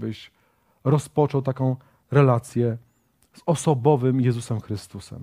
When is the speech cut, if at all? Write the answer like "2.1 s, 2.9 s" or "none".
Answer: none